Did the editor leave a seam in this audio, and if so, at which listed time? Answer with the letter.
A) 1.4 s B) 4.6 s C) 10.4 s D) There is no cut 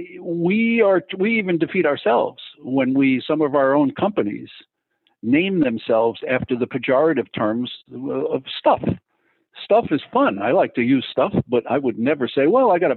D